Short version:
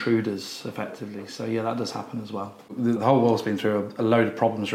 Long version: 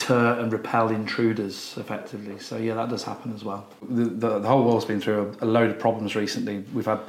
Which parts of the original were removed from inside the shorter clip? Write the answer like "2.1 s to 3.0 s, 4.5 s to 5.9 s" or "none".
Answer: 4.1 s to 4.4 s